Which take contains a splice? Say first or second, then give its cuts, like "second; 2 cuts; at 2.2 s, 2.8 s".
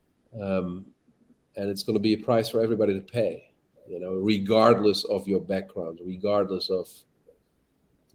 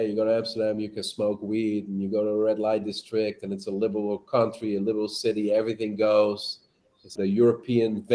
second; 1 cut; at 7.2 s